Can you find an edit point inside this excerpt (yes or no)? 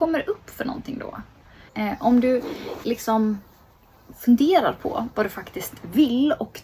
yes